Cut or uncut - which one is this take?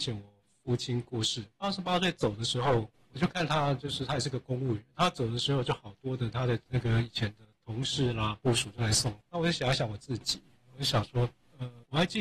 cut